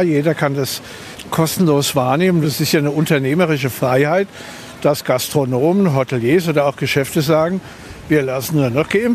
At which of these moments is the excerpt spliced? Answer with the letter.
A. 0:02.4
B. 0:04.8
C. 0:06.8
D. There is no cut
A